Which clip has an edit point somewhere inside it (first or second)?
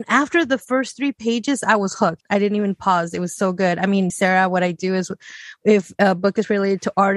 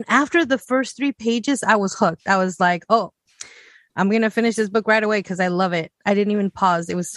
first